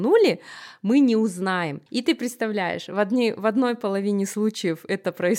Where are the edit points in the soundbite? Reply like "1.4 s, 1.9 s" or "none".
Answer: 1.9 s